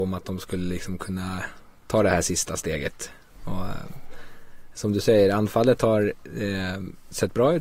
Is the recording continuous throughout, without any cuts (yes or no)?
yes